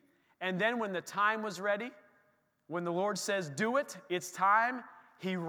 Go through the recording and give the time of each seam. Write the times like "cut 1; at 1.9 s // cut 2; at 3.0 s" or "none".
none